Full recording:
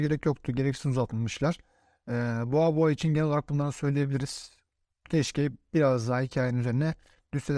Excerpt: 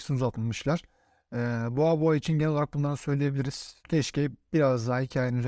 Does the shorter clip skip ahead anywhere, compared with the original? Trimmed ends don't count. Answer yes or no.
yes